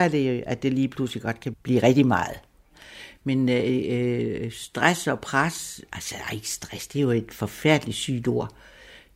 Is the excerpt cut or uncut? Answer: cut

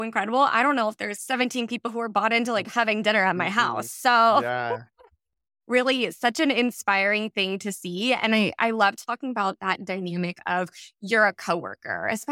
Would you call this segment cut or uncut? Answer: uncut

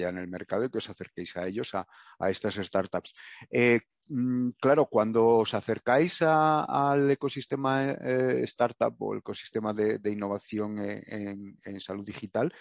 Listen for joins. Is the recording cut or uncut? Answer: uncut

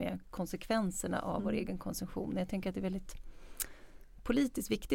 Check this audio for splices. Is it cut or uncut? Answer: uncut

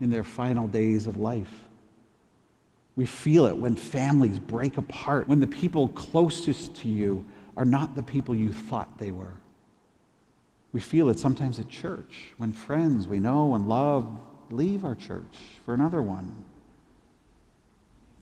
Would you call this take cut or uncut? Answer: cut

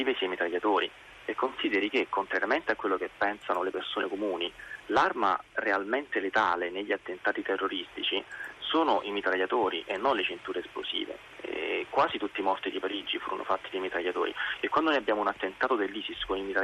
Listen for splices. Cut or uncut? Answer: uncut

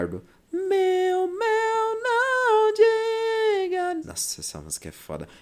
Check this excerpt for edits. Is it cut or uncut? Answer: cut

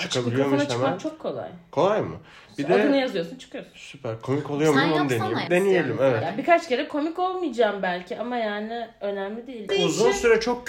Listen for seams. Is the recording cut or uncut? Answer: cut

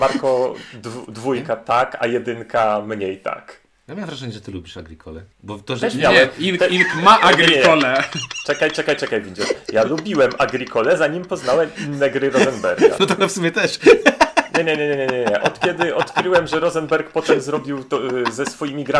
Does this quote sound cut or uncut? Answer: cut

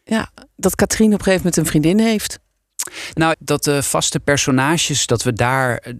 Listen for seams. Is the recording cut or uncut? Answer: cut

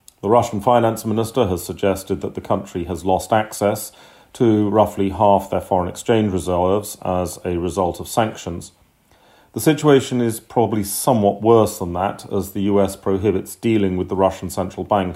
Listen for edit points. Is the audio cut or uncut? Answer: uncut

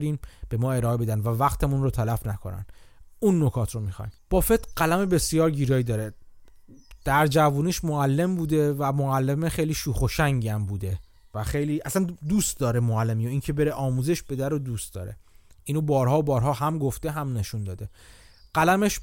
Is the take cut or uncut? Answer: uncut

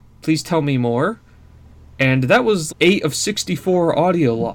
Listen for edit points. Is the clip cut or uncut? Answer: cut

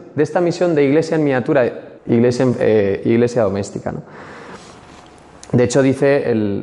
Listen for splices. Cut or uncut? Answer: cut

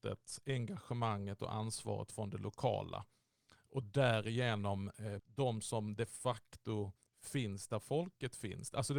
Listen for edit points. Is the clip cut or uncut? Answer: cut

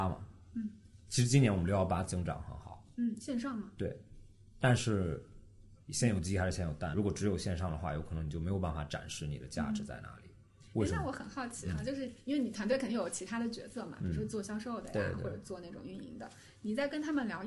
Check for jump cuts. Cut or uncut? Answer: uncut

